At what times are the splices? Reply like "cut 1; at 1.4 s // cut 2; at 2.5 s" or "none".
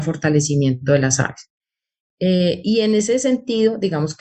none